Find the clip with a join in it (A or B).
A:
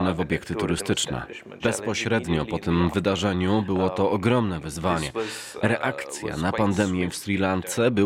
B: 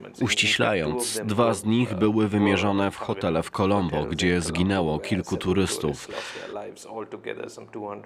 A